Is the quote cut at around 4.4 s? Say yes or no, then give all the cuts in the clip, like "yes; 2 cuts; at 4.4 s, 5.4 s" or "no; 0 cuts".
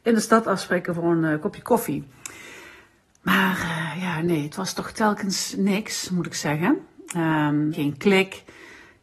no; 1 cut; at 7.7 s